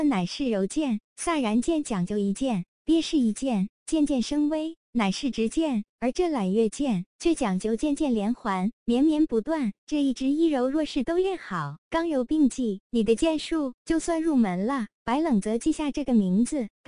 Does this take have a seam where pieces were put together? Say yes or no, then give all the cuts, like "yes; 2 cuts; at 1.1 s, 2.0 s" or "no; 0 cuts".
no; 0 cuts